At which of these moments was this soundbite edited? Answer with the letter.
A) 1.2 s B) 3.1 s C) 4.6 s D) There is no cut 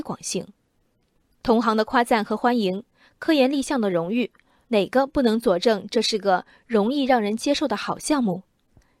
C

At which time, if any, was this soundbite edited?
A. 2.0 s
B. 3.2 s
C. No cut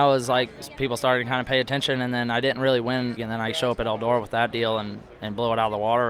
B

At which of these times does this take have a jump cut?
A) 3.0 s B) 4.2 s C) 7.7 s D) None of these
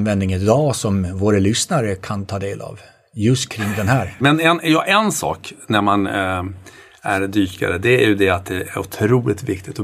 B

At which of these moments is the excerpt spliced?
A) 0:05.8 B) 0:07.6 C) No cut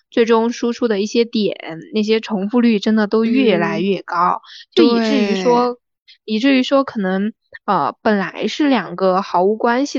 C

